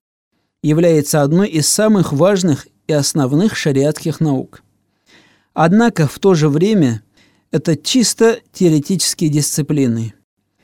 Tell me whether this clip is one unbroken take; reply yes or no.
yes